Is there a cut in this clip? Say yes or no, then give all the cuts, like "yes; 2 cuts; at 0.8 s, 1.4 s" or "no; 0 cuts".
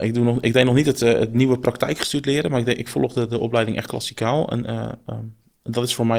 no; 0 cuts